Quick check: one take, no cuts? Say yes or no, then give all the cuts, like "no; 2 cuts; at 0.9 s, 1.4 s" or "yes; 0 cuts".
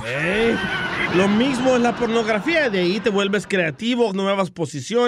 no; 1 cut; at 4.1 s